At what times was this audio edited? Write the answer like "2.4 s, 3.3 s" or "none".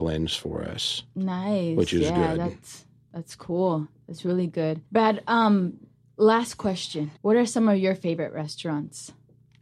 4.9 s, 7.2 s

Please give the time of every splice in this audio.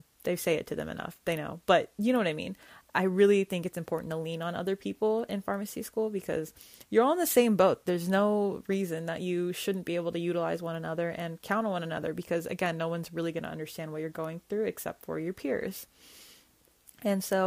none

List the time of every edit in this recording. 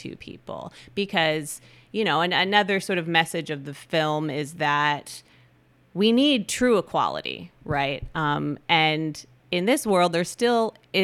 none

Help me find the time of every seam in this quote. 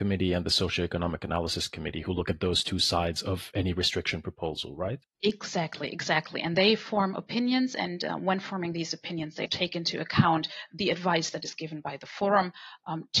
5.1 s, 9.5 s

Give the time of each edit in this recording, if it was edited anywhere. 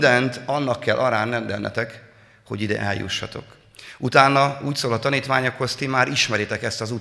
none

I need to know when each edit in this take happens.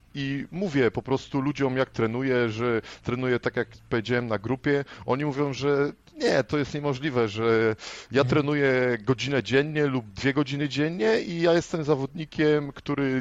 none

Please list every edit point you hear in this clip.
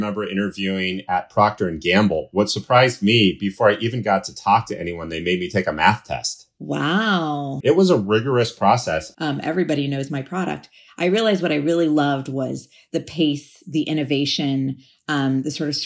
7.6 s, 9.1 s

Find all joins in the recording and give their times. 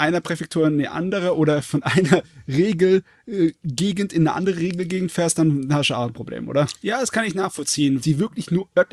6.8 s, 8.0 s

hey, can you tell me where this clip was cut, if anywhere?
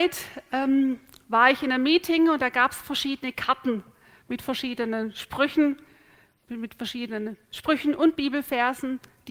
none

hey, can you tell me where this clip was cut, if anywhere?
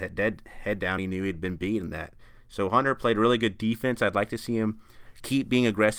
none

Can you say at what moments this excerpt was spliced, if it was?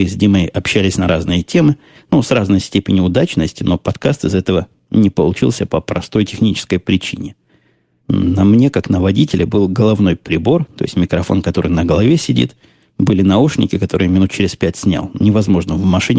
none

